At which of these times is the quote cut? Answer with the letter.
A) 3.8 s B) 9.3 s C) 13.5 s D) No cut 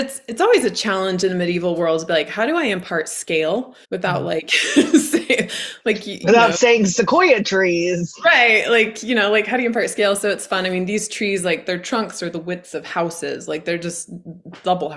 A